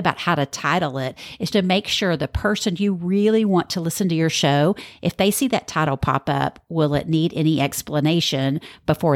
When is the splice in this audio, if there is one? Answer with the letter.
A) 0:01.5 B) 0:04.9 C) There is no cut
A